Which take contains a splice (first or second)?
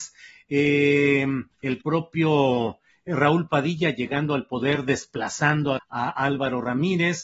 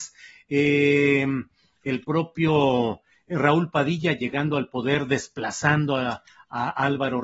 first